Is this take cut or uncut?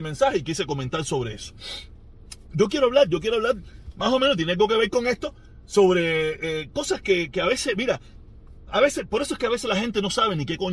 uncut